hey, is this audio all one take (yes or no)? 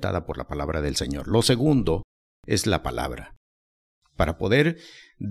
yes